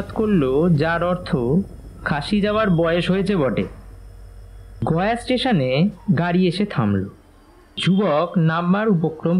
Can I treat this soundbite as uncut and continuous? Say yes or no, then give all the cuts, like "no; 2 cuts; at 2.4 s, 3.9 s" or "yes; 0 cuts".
yes; 0 cuts